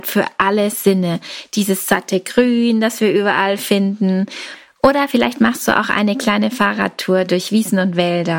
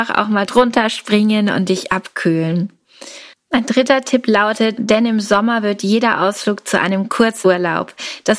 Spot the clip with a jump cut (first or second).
second